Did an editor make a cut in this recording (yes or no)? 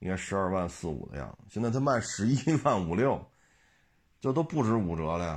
no